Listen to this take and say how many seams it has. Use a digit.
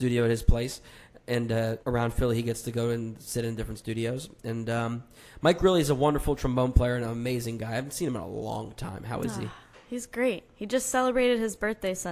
1